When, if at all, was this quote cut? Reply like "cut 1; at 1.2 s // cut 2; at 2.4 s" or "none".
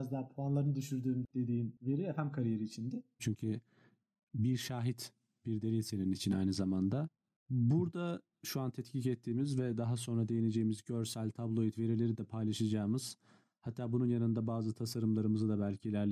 cut 1; at 3.2 s